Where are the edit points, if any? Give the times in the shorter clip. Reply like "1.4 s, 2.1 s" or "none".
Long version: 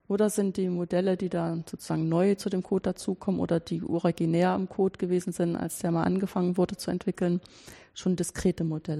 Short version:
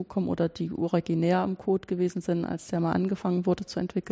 none